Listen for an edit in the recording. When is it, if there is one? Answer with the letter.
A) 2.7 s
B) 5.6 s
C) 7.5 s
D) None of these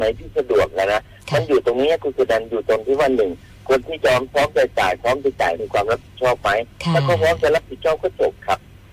B